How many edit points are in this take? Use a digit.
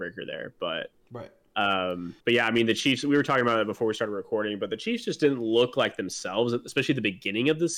1